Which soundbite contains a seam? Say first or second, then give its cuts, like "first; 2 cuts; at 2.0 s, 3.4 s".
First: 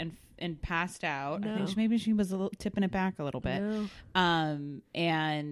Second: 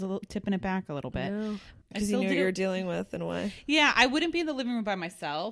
second; 1 cut; at 1.8 s